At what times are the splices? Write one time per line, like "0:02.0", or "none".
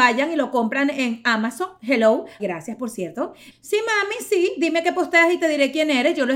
0:02.4
0:03.5